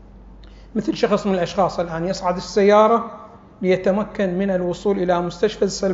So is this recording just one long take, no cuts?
yes; 0 cuts

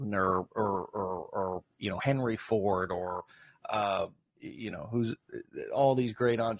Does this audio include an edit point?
no; 0 cuts

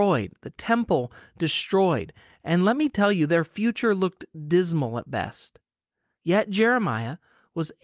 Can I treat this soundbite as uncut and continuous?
yes; 0 cuts

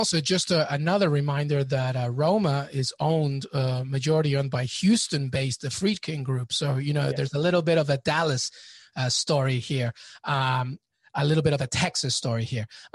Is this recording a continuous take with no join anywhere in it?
yes; 0 cuts

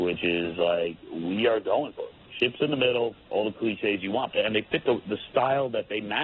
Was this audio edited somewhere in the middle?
yes; 2 cuts; at 3.1 s, 4.3 s

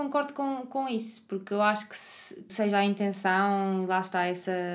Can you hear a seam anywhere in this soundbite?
yes; 1 cut; at 2.5 s

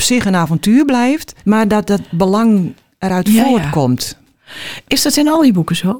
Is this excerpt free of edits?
no; 1 cut; at 1.4 s

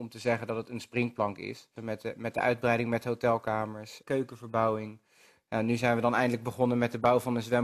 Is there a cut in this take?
yes; 2 cuts; at 1.8 s, 4.0 s

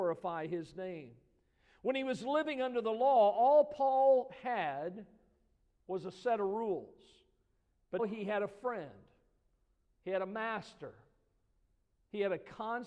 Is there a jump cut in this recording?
yes; 1 cut; at 8.0 s

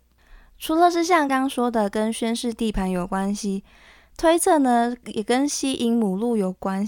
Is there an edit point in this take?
yes; 1 cut; at 1.3 s

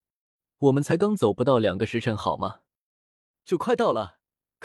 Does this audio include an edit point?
no; 0 cuts

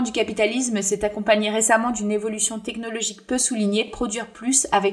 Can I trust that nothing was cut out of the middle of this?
yes; 0 cuts

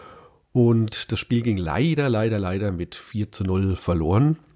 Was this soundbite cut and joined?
no; 0 cuts

